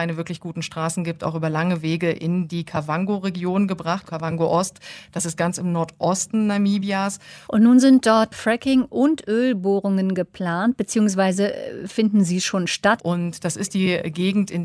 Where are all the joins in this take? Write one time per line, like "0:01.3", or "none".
0:04.1
0:07.5
0:13.0